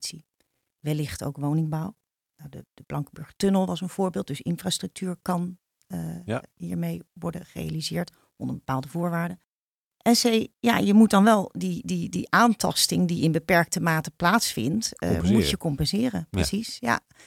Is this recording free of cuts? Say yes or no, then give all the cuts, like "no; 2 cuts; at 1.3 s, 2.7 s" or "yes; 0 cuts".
yes; 0 cuts